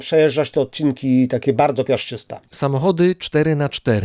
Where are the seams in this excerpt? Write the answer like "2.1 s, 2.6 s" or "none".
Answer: 2.5 s